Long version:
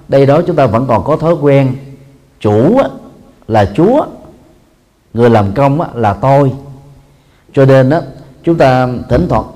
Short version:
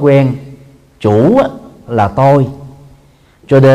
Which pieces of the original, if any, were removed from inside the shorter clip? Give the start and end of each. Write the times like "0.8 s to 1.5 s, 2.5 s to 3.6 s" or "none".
3.3 s to 5.9 s